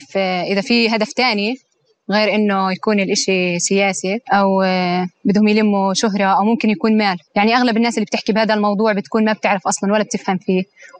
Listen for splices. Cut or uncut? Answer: cut